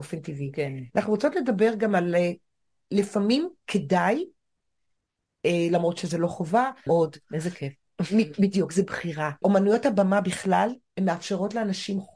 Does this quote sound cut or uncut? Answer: cut